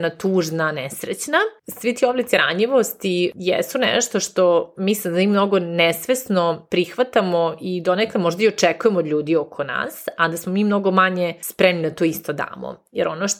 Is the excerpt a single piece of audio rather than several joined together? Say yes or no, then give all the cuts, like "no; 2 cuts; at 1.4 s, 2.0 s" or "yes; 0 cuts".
no; 1 cut; at 1.6 s